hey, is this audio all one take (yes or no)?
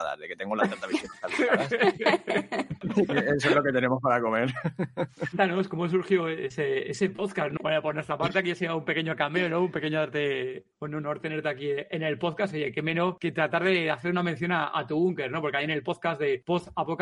no